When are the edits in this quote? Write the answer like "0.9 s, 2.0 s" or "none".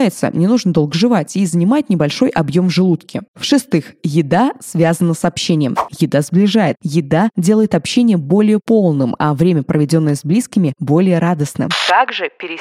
3.3 s, 5.9 s